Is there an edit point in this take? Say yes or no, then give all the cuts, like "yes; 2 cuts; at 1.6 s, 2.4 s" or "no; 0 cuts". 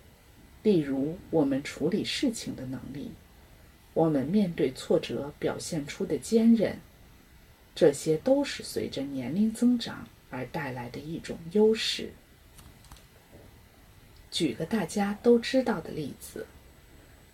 no; 0 cuts